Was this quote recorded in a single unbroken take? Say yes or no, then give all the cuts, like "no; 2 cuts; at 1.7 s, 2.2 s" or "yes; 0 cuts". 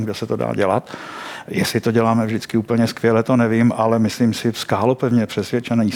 yes; 0 cuts